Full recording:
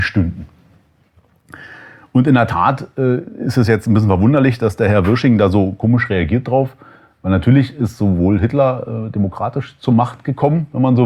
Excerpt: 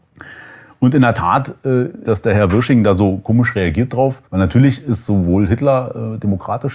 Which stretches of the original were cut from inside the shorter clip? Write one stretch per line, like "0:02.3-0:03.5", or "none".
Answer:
0:03.4-0:04.6
0:06.8-0:07.2